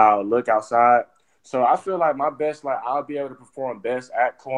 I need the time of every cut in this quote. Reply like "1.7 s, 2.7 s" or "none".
none

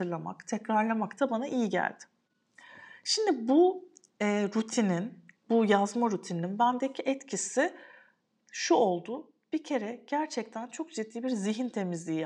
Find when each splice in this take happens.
none

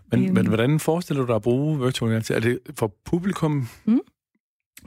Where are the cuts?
none

